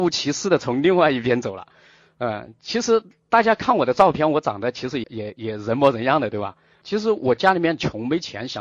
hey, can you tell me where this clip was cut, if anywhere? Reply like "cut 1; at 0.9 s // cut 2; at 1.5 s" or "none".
cut 1; at 5.0 s // cut 2; at 6.8 s